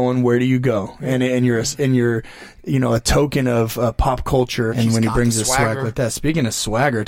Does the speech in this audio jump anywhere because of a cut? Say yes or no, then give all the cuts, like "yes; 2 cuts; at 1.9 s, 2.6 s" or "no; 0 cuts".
yes; 1 cut; at 4.7 s